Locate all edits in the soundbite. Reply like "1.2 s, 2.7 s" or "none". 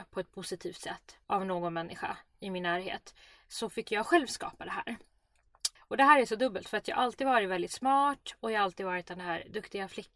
1.2 s, 5.8 s